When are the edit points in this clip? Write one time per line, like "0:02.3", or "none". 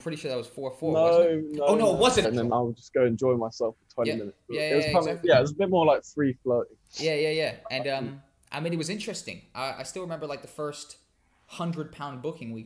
0:02.2